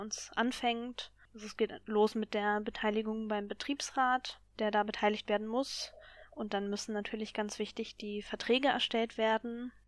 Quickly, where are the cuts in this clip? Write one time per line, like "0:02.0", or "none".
none